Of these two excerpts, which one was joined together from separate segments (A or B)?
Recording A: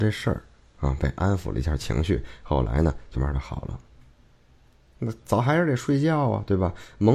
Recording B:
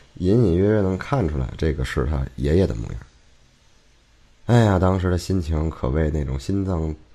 A